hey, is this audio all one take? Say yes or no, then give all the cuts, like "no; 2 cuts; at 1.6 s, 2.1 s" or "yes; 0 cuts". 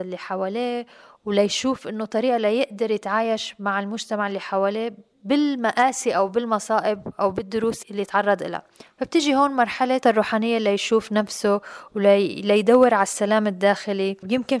no; 1 cut; at 7.8 s